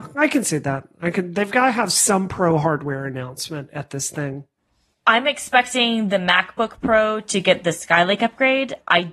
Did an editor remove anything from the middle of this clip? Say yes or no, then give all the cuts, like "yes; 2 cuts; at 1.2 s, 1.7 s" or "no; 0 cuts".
no; 0 cuts